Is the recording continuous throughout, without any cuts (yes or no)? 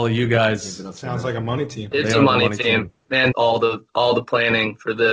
no